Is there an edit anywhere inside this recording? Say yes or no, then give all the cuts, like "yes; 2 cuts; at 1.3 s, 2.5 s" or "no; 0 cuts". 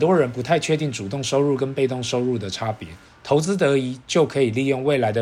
yes; 1 cut; at 3.1 s